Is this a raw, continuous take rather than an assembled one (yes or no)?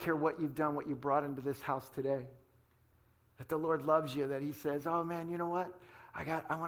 yes